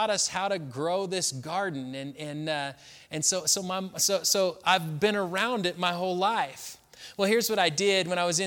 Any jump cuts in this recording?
no; 0 cuts

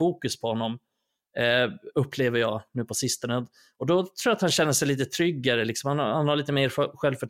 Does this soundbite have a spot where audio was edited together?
no; 0 cuts

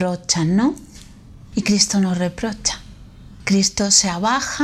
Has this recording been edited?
no; 0 cuts

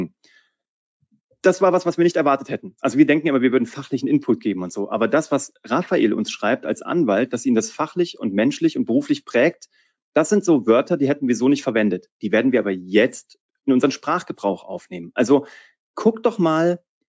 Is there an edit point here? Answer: no; 0 cuts

